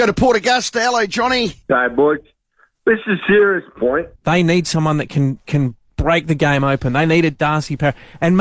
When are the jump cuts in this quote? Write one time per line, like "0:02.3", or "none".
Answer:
0:01.6
0:04.2

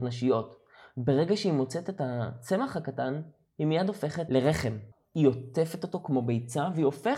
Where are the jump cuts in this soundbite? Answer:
none

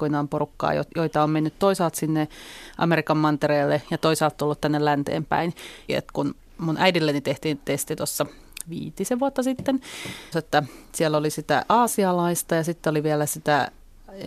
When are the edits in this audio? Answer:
0:05.9
0:10.3

